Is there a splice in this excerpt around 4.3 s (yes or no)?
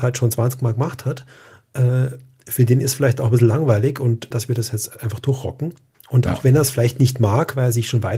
yes